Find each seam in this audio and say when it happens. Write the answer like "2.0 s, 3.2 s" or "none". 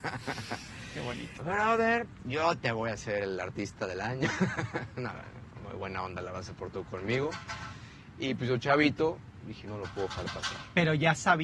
1.4 s, 9.6 s

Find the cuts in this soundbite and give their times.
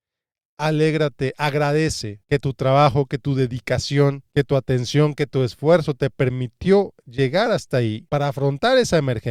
none

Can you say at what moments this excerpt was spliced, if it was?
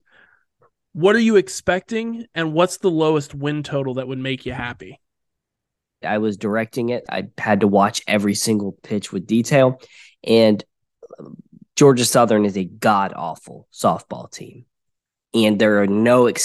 6.0 s, 7.1 s

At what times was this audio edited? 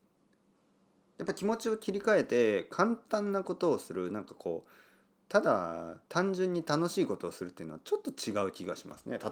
6.1 s

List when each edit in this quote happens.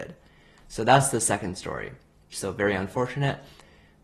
2.3 s

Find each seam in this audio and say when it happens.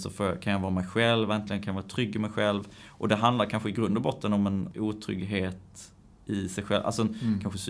none

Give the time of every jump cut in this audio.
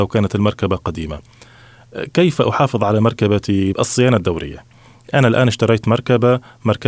3.7 s

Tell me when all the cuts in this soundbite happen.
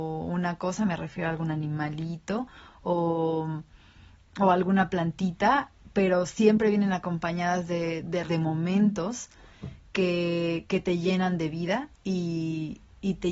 8.3 s, 11.9 s

